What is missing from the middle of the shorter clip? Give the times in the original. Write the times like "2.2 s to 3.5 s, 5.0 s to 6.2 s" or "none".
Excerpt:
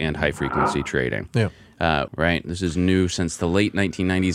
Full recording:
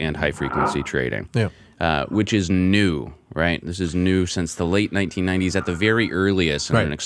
2.1 s to 3.3 s